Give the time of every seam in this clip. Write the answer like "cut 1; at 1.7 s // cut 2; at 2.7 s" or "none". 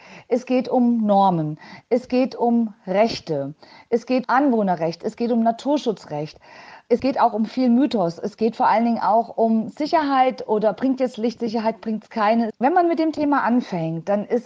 cut 1; at 4.2 s // cut 2; at 12.5 s